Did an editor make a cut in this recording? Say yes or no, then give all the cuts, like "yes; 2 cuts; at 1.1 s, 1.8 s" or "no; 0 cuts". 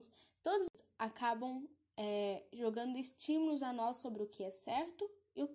no; 0 cuts